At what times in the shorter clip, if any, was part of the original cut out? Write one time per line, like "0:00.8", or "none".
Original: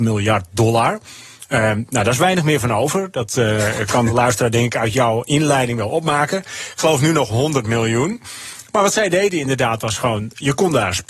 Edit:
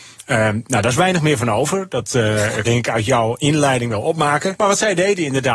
0:02.6
0:04.5